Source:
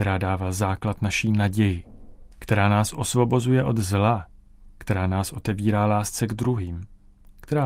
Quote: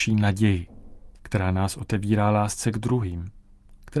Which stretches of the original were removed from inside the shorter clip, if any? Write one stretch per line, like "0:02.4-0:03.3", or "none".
0:02.3-0:04.7